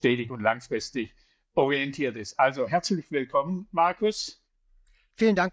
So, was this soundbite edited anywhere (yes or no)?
no